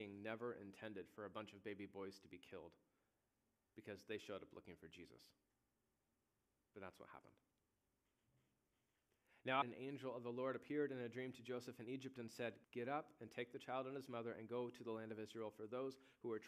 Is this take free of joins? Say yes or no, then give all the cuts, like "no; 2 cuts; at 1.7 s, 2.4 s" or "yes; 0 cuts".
no; 2 cuts; at 9.6 s, 12.6 s